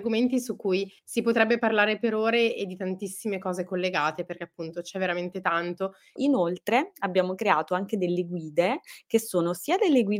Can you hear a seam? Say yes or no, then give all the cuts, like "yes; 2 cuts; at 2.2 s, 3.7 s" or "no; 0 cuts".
yes; 2 cuts; at 1.0 s, 6.2 s